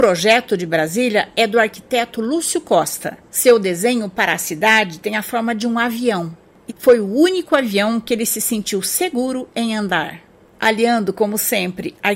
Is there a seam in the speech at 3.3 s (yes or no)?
no